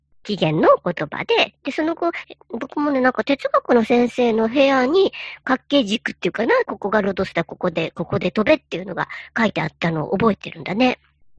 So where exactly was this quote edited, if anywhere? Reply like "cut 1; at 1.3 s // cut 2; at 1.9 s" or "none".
cut 1; at 2.2 s // cut 2; at 5.4 s // cut 3; at 6.6 s